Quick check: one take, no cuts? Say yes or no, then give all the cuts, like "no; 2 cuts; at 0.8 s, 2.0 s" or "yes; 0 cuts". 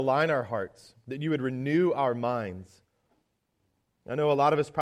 yes; 0 cuts